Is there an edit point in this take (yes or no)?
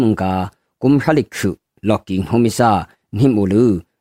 no